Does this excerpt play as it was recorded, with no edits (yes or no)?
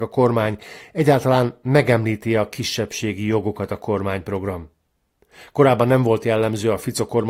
yes